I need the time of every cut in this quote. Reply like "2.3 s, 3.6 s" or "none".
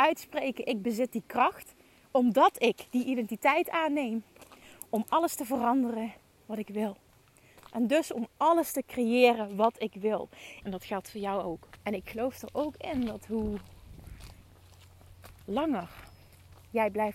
10.6 s, 11.8 s